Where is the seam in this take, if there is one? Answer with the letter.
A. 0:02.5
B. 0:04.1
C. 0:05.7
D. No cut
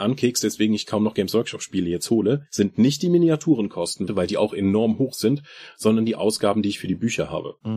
B